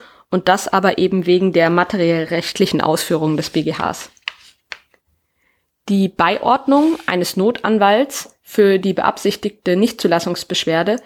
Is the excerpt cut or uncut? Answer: uncut